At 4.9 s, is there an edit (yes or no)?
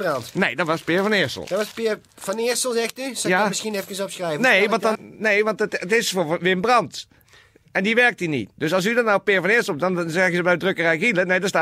yes